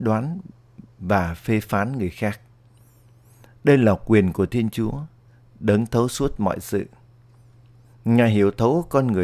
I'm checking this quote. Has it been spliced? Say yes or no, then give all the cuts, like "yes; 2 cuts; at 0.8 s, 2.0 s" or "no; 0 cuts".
no; 0 cuts